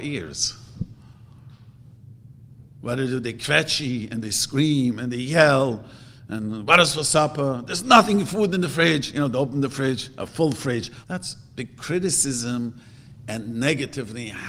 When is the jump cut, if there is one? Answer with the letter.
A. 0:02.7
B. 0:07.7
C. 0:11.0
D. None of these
C